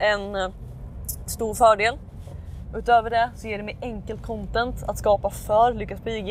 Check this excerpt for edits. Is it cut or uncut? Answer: uncut